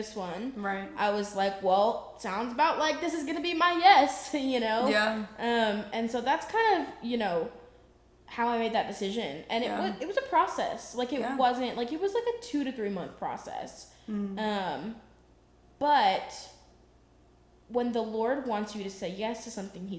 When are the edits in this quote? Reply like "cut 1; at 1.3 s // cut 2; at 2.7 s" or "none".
none